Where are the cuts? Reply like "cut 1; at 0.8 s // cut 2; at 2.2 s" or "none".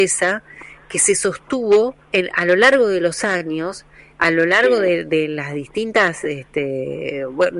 cut 1; at 2.0 s